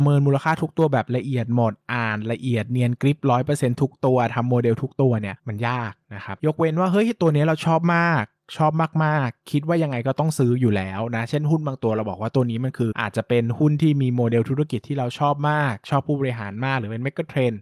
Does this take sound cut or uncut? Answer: cut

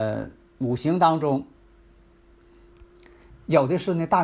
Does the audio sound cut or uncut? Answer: cut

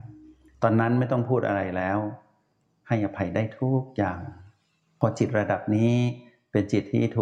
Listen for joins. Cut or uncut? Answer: uncut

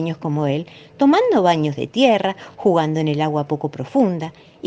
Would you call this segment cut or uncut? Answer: uncut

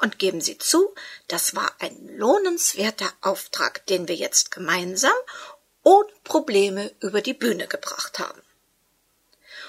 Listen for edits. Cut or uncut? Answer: uncut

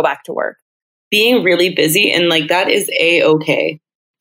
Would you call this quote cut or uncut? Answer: uncut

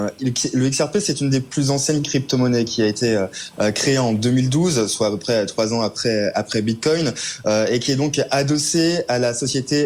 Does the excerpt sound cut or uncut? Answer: uncut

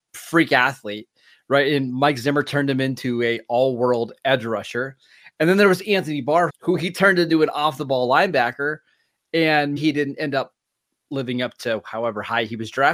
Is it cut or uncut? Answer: cut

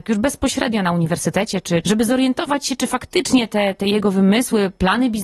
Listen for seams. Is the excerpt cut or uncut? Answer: cut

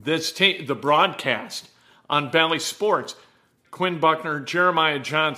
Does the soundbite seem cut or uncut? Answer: cut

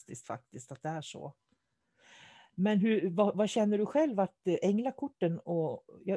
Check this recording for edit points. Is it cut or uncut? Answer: uncut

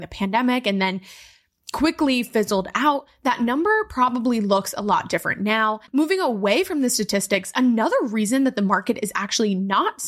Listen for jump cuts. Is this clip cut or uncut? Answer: cut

